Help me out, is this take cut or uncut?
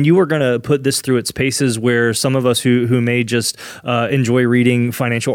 uncut